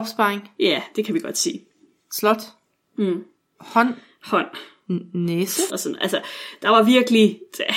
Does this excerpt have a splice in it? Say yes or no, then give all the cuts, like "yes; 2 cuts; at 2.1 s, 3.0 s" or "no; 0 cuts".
yes; 1 cut; at 5.7 s